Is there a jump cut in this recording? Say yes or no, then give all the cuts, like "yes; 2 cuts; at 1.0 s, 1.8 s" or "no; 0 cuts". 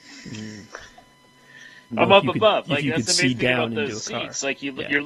yes; 1 cut; at 1.9 s